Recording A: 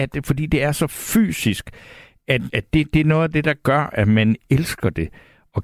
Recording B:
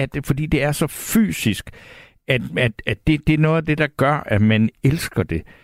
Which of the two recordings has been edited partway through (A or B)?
A